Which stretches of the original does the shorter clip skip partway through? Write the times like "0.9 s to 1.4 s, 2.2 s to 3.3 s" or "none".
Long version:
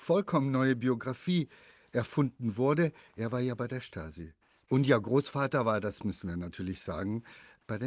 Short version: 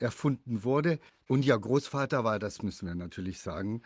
3.0 s to 4.5 s